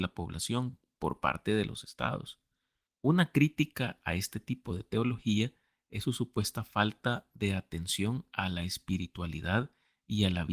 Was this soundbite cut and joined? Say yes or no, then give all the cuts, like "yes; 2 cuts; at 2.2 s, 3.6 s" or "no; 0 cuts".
yes; 1 cut; at 2.9 s